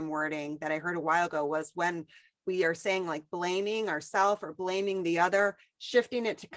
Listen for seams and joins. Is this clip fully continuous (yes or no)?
yes